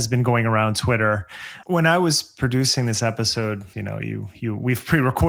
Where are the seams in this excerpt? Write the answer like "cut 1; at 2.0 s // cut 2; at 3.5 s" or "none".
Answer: cut 1; at 1.6 s // cut 2; at 3.7 s